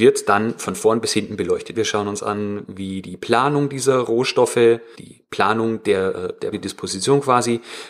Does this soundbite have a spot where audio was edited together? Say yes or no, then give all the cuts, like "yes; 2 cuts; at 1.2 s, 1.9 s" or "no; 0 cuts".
yes; 3 cuts; at 1.7 s, 4.9 s, 6.5 s